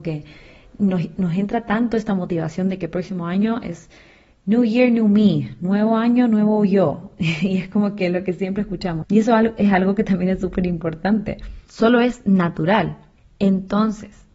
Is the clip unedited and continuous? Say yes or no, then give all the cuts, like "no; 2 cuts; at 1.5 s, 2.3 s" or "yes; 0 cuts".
no; 2 cuts; at 9.0 s, 11.7 s